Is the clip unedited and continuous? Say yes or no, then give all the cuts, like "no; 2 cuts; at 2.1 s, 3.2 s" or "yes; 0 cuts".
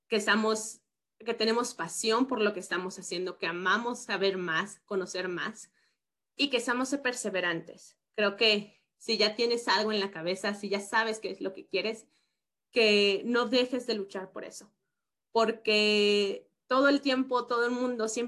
yes; 0 cuts